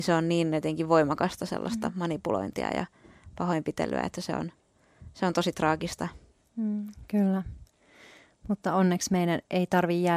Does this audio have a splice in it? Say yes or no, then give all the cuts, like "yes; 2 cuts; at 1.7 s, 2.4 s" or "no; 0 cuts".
no; 0 cuts